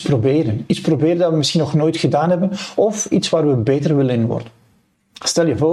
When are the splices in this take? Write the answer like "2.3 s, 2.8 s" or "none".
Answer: none